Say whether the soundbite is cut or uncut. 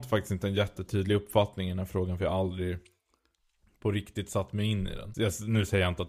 cut